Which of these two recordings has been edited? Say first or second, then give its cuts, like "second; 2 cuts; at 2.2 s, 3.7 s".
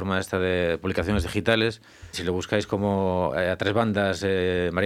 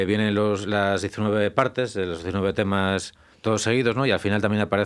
first; 1 cut; at 2.1 s